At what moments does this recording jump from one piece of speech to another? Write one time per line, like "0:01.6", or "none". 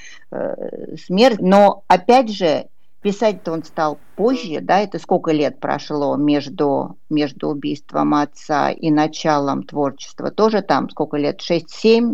0:01.4